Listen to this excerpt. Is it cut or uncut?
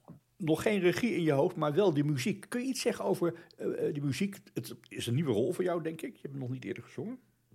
uncut